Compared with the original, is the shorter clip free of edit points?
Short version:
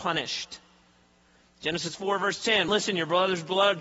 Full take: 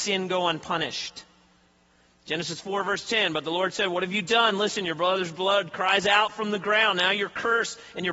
no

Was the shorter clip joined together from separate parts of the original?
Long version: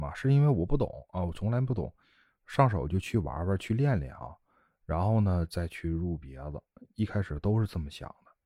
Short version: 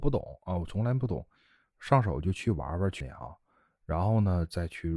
yes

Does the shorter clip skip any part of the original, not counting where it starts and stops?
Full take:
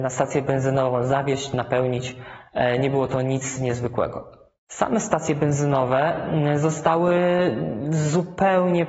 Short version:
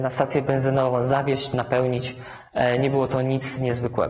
no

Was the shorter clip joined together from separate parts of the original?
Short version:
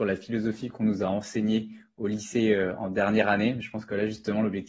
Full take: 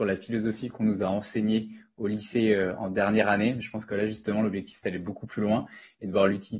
no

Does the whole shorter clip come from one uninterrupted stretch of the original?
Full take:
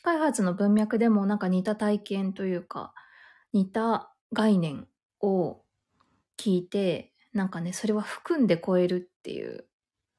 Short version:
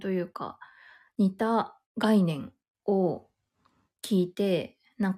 yes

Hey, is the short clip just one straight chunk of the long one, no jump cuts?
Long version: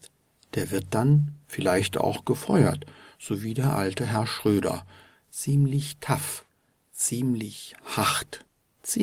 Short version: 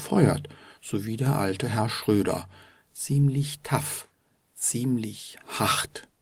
yes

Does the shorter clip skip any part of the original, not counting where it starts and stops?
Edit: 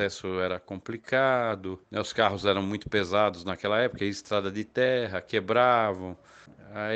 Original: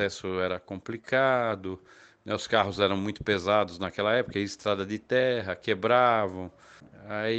yes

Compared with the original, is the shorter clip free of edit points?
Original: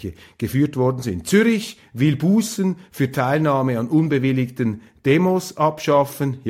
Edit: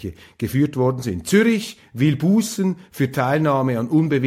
yes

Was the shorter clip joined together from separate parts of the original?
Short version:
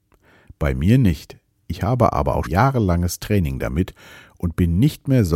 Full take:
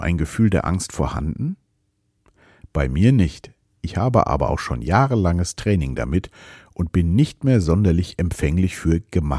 yes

